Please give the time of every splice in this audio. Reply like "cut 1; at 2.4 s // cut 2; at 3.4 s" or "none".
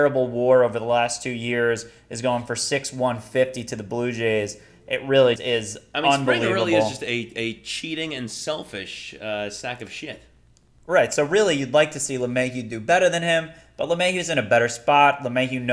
cut 1; at 5.4 s

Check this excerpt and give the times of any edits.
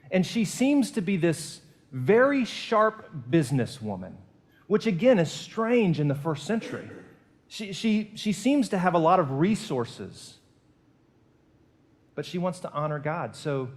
none

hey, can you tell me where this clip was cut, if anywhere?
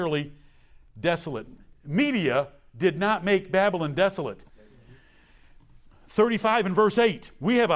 cut 1; at 4.5 s

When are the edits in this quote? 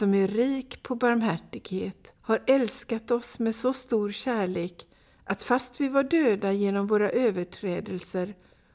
cut 1; at 2.2 s

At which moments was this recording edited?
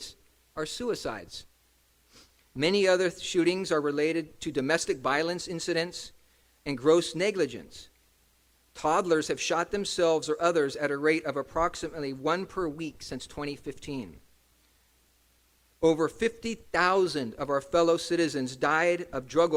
none

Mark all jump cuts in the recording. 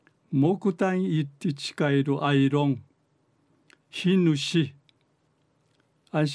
none

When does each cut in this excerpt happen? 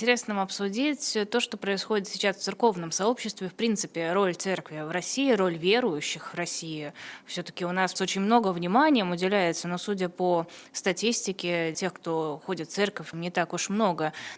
cut 1; at 8.0 s // cut 2; at 11.7 s // cut 3; at 13.1 s

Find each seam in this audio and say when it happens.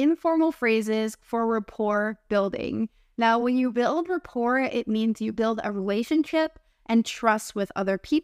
none

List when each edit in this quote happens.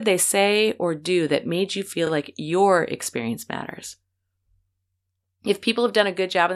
none

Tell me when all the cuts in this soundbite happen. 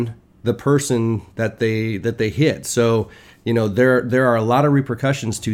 none

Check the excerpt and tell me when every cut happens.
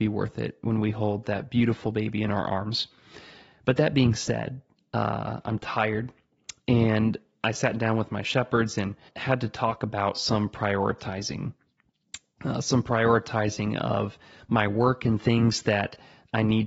cut 1; at 9.1 s

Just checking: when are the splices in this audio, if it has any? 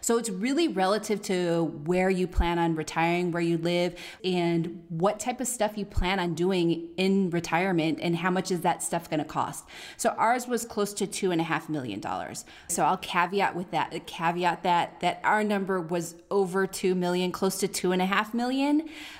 cut 1; at 4.2 s // cut 2; at 12.7 s

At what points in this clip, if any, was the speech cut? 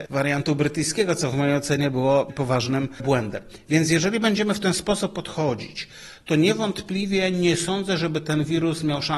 none

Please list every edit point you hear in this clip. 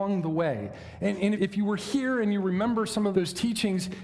cut 1; at 1.3 s // cut 2; at 3.1 s

